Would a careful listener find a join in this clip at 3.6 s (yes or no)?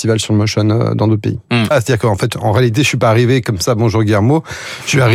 no